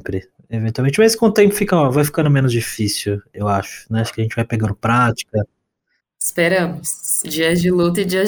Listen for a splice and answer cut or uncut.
uncut